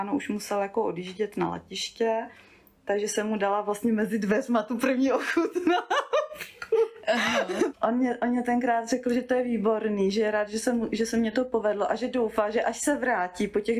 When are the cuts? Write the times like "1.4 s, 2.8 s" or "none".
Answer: 7.7 s